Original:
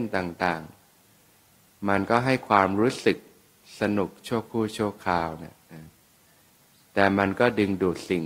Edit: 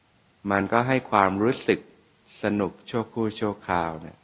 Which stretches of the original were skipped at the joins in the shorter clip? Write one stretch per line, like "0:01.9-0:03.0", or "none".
none